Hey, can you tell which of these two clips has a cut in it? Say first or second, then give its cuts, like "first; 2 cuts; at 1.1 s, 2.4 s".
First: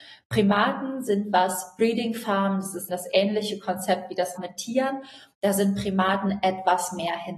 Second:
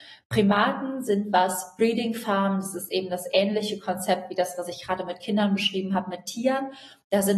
first; 2 cuts; at 2.9 s, 4.4 s